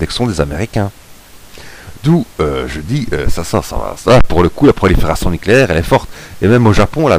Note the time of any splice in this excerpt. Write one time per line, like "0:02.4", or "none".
0:01.9
0:04.0